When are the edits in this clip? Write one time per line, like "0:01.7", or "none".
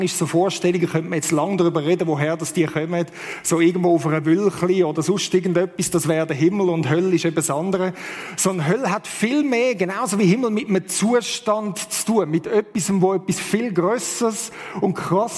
none